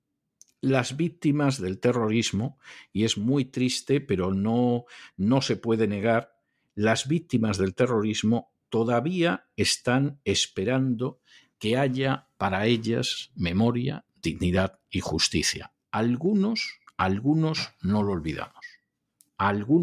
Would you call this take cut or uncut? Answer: uncut